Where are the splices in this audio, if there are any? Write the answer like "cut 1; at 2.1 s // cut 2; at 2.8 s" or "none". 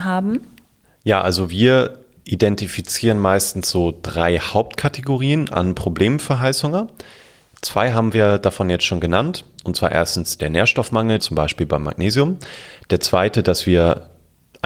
cut 1; at 11.2 s

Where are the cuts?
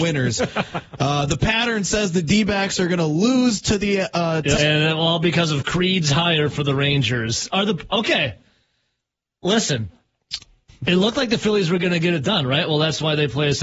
cut 1; at 4.6 s

